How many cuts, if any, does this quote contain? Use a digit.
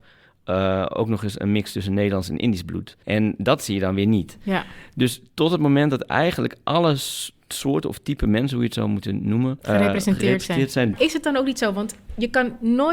3